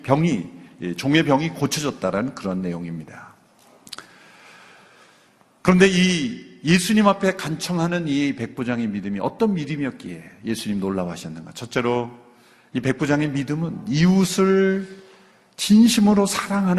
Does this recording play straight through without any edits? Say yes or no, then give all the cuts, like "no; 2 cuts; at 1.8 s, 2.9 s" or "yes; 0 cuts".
yes; 0 cuts